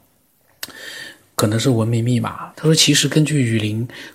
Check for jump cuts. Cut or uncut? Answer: cut